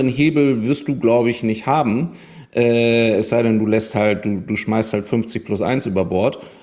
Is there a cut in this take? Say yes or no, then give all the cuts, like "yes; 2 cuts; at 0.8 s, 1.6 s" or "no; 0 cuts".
no; 0 cuts